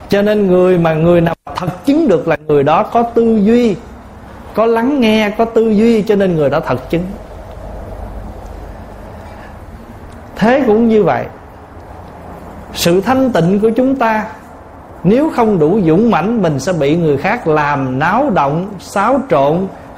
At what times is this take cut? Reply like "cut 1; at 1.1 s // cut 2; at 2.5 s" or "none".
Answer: none